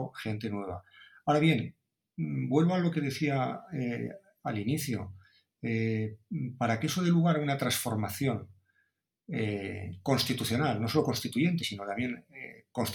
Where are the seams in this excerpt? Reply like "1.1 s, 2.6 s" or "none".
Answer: none